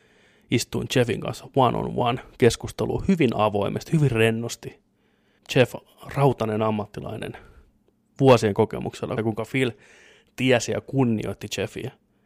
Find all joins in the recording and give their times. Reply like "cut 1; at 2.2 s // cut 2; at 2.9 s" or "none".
cut 1; at 5.4 s // cut 2; at 9.2 s